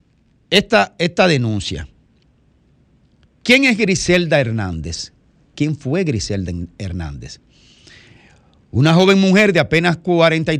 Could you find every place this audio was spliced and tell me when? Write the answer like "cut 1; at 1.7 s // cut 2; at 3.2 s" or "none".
cut 1; at 5.5 s

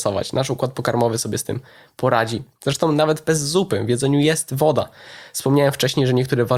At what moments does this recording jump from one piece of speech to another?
none

